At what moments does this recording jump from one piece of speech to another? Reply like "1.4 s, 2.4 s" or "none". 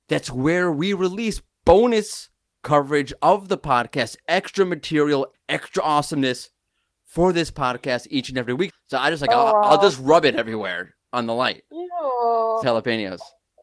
5.3 s, 8.7 s, 12.6 s